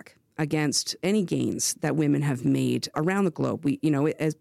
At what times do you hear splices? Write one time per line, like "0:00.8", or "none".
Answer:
0:02.9